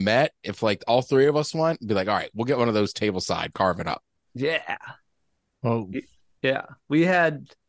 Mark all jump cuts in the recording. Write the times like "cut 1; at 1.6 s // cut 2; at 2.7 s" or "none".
none